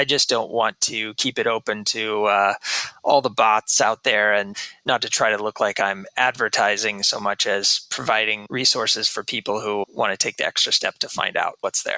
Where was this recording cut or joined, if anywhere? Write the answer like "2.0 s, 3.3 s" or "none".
9.8 s